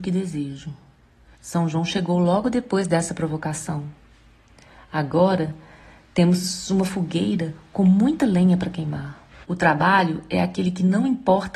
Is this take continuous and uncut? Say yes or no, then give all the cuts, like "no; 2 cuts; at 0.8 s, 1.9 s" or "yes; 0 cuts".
no; 2 cuts; at 1.3 s, 9.4 s